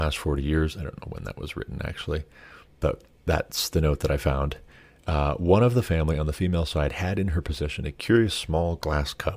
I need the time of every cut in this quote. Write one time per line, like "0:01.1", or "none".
none